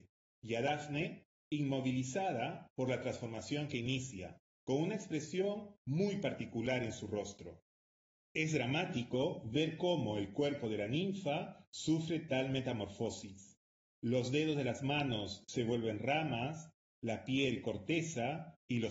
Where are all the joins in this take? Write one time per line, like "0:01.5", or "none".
none